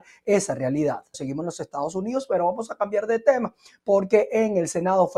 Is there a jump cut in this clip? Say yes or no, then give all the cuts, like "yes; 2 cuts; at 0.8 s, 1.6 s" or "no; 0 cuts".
yes; 1 cut; at 1.1 s